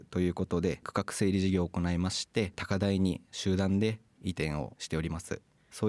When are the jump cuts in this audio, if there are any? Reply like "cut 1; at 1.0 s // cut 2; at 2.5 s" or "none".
none